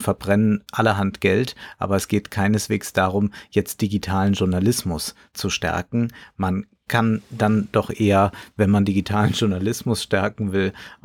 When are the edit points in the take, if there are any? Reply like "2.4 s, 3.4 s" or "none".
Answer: none